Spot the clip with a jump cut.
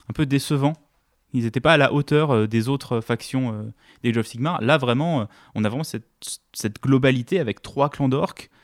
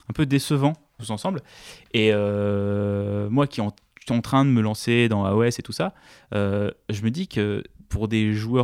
second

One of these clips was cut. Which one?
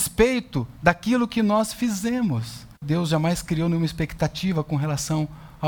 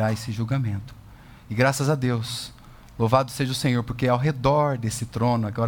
first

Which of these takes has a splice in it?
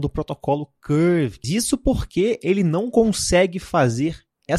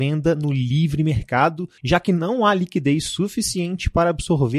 first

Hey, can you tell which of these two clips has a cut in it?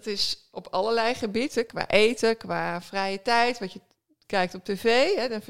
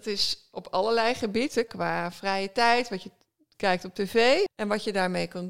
second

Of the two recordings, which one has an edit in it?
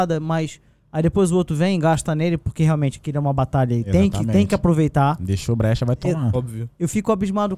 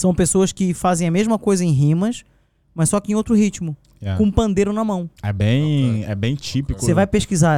first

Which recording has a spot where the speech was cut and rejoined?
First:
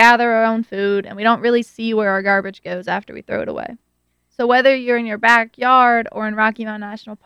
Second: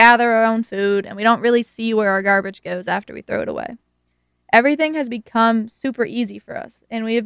first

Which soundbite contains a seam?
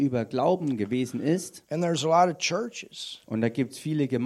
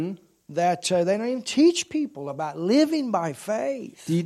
first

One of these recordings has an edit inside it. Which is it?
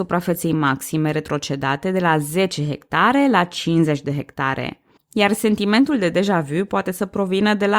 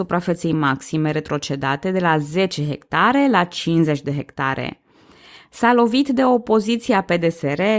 first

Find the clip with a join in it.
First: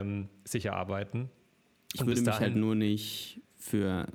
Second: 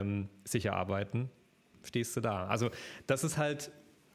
second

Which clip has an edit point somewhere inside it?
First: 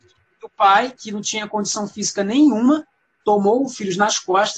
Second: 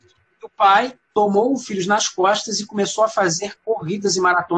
second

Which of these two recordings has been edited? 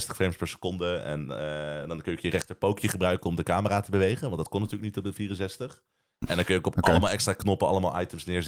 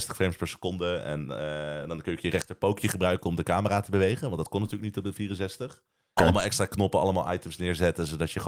second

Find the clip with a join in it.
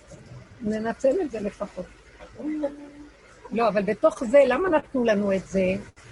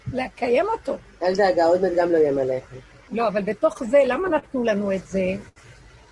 second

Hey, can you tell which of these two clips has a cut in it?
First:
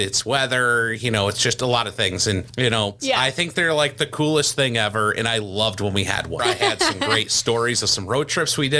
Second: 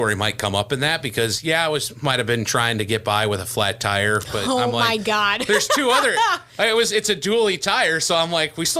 first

